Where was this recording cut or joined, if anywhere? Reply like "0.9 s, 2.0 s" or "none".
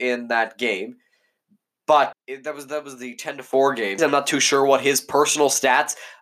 2.1 s, 4.0 s